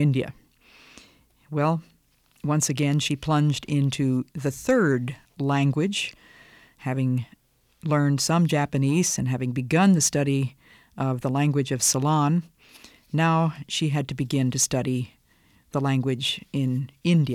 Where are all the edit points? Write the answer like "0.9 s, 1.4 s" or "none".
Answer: none